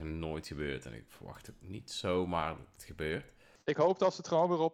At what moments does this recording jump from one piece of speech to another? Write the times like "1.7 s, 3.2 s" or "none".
3.6 s

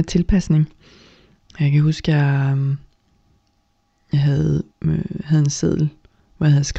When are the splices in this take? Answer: 4.7 s

